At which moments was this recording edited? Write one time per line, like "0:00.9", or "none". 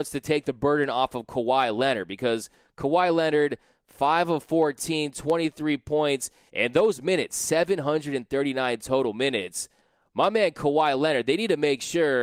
0:06.5